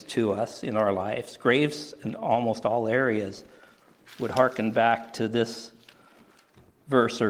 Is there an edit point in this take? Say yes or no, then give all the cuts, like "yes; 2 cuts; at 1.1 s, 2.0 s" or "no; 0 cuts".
no; 0 cuts